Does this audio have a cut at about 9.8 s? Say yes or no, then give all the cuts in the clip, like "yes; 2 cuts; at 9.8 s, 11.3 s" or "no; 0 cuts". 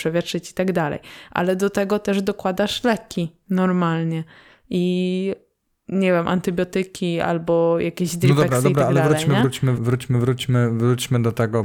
yes; 1 cut; at 9.8 s